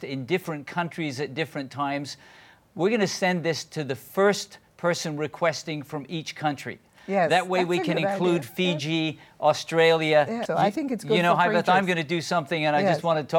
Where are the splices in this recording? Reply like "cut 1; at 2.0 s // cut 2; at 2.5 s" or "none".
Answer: cut 1; at 10.5 s